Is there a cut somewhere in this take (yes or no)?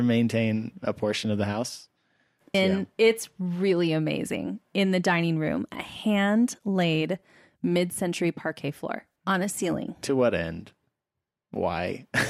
yes